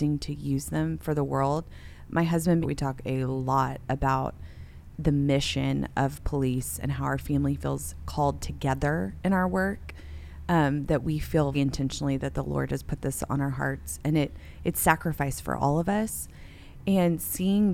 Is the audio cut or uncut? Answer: cut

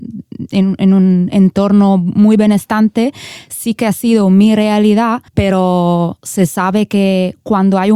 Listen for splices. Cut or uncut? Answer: cut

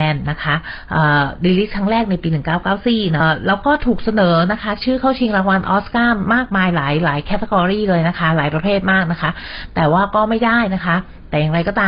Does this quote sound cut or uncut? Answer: cut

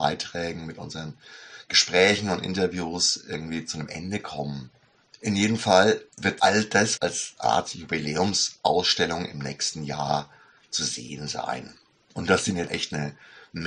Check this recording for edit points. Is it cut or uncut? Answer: cut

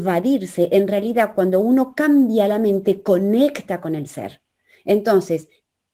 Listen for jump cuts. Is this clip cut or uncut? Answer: uncut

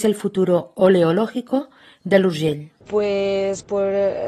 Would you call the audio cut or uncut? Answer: cut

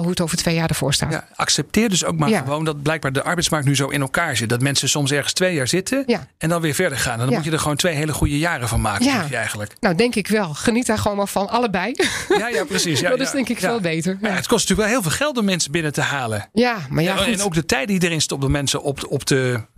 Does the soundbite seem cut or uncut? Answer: uncut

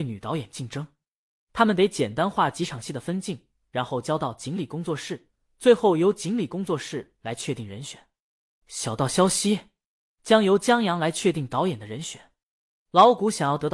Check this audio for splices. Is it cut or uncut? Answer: uncut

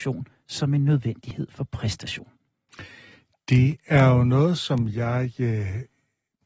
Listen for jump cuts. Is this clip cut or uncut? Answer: uncut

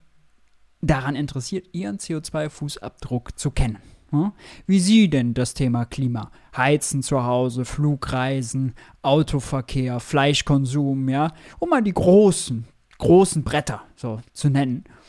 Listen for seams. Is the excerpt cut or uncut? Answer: uncut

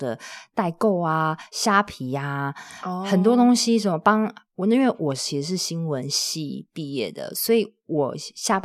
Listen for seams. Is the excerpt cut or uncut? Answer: uncut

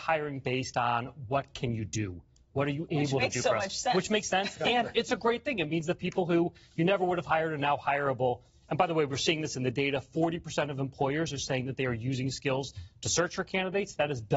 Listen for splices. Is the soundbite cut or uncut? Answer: uncut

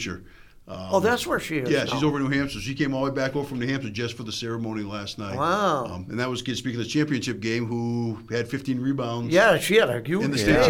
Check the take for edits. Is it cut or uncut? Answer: uncut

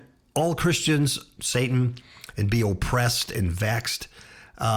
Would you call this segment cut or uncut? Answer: cut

